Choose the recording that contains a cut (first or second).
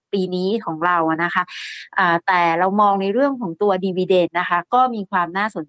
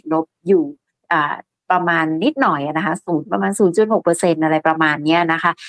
first